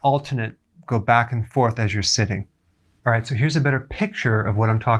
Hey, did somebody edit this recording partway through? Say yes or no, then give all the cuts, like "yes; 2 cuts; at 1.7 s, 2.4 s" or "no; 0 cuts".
no; 0 cuts